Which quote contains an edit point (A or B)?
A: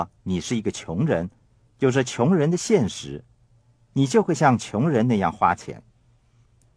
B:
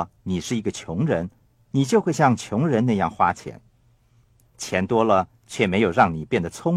B